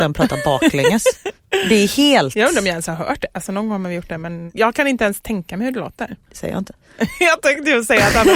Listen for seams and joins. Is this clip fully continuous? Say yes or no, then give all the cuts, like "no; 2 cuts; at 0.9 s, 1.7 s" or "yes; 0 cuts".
no; 1 cut; at 6.3 s